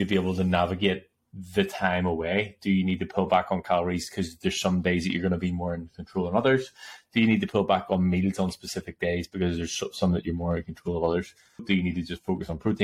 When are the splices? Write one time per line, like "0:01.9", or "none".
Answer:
0:11.6